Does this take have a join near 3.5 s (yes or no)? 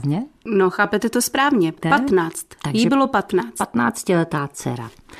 no